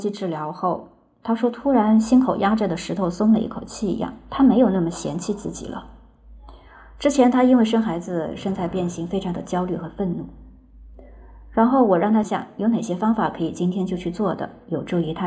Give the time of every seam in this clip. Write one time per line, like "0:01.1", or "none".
0:12.2